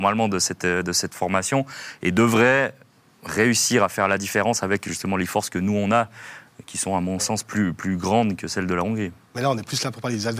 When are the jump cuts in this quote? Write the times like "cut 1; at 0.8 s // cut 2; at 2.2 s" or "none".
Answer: none